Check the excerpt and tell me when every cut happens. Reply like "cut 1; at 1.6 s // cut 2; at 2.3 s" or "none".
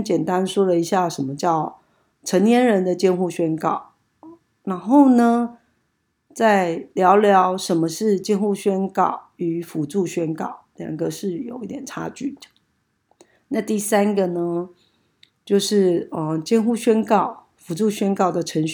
none